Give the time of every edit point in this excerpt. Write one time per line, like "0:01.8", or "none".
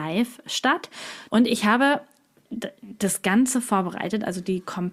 0:01.3